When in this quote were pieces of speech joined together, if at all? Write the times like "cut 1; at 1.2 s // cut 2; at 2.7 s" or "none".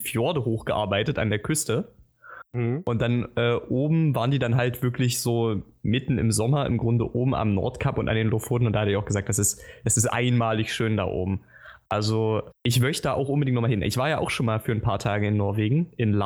cut 1; at 12.5 s